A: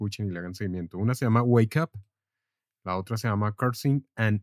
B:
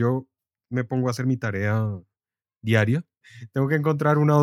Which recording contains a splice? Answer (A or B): B